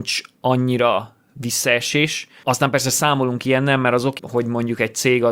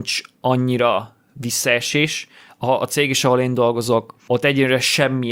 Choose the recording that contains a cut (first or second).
first